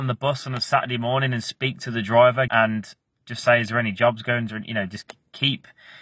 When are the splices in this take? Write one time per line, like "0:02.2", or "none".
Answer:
0:02.5